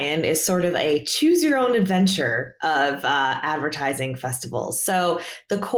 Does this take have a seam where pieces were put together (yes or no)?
no